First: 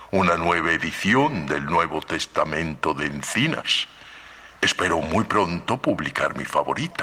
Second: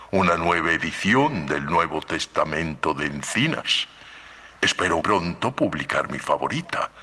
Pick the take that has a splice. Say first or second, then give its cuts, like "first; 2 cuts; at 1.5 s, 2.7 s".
second; 1 cut; at 5.0 s